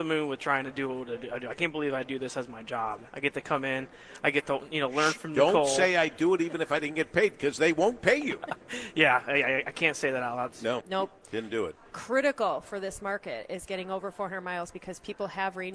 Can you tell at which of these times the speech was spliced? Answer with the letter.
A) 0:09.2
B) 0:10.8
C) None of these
B